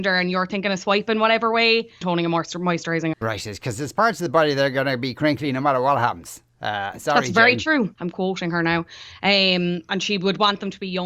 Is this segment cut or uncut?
cut